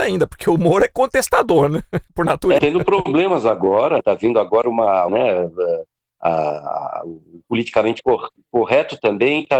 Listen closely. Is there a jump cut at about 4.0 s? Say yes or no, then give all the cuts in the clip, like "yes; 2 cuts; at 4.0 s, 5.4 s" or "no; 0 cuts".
yes; 3 cuts; at 2.6 s, 4.0 s, 5.1 s